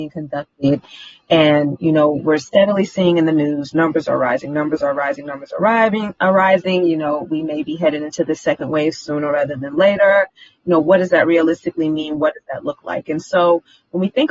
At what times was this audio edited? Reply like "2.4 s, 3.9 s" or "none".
none